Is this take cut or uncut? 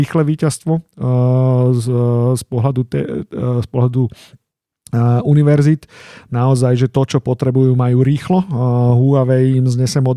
uncut